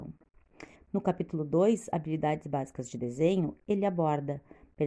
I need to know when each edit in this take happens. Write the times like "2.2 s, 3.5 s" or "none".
none